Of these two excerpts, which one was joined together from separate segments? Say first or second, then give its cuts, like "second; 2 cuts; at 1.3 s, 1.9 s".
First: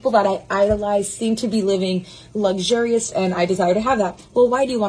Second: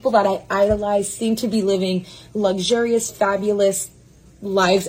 first; 1 cut; at 3.1 s